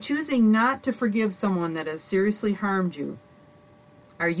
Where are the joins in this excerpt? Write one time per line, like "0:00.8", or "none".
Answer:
none